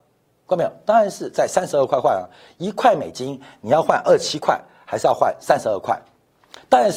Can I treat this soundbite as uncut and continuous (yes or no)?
yes